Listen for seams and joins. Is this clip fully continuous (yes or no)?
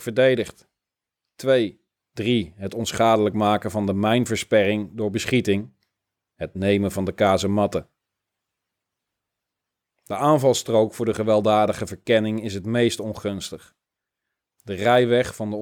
no